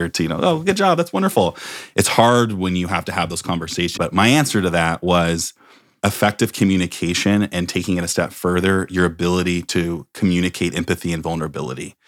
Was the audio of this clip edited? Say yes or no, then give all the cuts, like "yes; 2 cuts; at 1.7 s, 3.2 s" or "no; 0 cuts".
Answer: yes; 1 cut; at 4.0 s